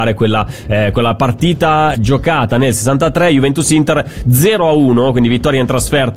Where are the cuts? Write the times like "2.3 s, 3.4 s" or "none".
1.9 s